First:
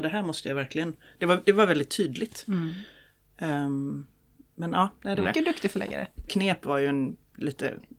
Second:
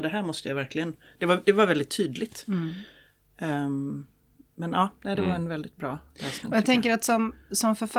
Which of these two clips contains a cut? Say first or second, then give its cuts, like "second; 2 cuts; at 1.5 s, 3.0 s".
first; 2 cuts; at 5.2 s, 6.3 s